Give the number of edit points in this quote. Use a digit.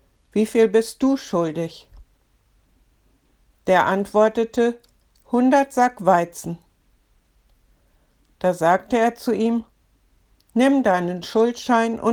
0